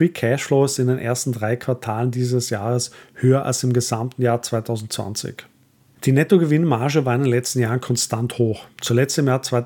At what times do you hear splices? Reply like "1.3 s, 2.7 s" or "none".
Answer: none